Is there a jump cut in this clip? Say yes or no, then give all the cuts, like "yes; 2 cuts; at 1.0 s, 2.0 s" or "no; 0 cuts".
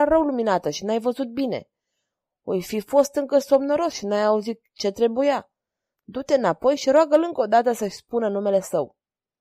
no; 0 cuts